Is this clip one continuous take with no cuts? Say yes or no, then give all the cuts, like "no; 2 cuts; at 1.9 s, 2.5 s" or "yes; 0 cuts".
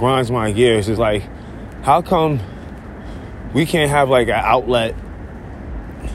yes; 0 cuts